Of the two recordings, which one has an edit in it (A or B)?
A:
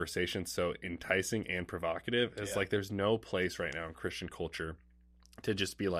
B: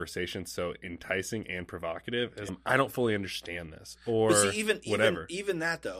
B